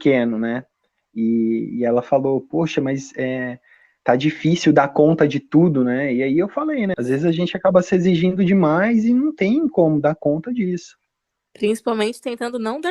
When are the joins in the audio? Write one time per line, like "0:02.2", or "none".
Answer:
0:06.9